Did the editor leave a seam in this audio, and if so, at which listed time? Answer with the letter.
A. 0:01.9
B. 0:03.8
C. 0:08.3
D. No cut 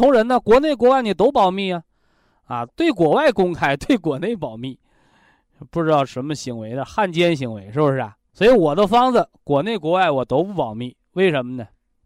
C